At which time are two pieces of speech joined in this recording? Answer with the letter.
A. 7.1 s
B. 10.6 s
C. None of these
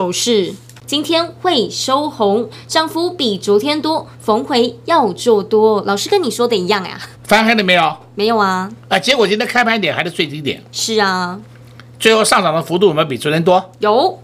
A